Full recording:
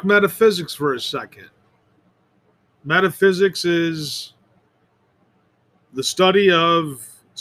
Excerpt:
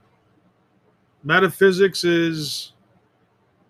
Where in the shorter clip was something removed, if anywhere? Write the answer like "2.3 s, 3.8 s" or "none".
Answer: none